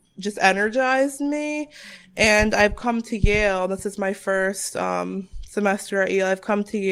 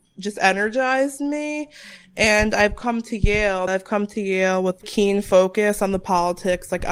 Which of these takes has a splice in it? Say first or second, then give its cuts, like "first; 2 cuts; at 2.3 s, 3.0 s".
second; 2 cuts; at 3.7 s, 4.8 s